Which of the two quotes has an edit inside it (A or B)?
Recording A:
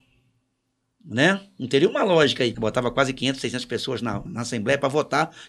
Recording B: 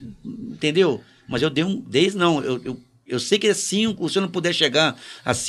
A